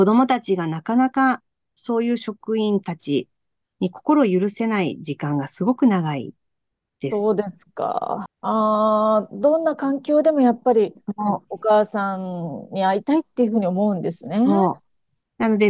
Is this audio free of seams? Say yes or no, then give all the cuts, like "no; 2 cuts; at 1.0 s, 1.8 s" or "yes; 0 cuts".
no; 1 cut; at 8.3 s